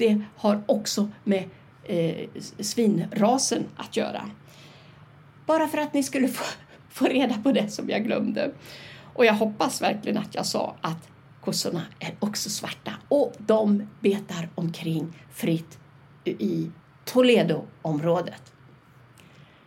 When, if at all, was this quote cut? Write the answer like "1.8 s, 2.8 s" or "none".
none